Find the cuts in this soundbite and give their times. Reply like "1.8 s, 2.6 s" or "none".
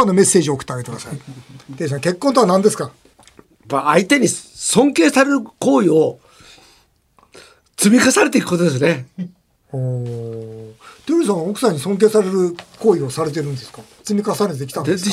none